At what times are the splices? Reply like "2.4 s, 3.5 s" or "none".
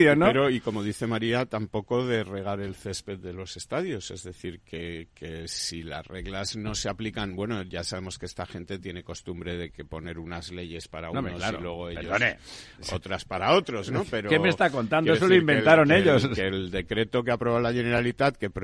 none